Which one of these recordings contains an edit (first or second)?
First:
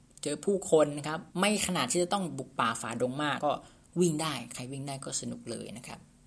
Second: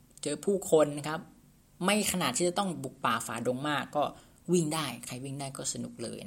first